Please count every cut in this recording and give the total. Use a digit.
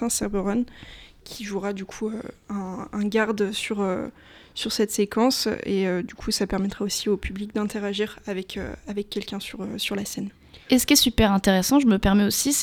0